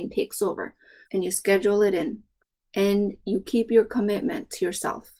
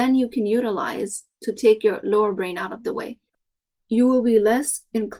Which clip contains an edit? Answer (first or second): first